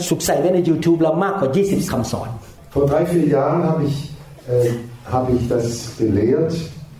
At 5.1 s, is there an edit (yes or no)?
no